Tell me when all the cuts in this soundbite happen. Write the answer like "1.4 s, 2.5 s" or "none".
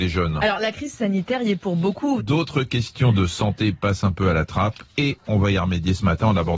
2.2 s